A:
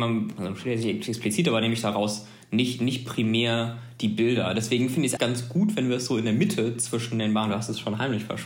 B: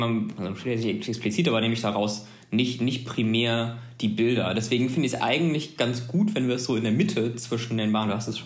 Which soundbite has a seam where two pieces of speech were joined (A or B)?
A